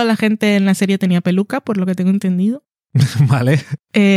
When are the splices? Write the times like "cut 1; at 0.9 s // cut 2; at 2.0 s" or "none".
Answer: none